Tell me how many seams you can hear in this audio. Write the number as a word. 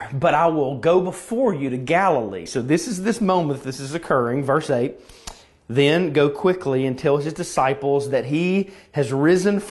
two